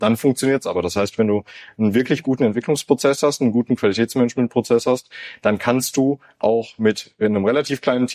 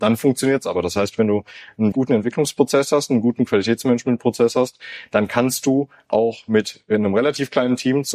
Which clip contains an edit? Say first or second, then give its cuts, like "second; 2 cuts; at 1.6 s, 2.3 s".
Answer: second; 1 cut; at 1.9 s